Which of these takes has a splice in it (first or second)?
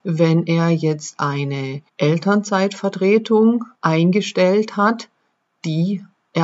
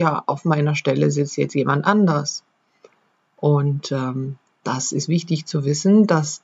first